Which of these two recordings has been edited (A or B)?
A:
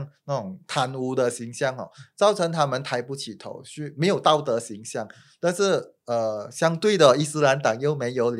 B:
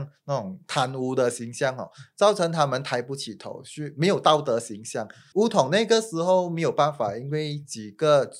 B